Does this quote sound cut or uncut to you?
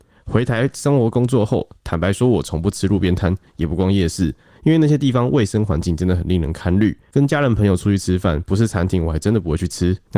uncut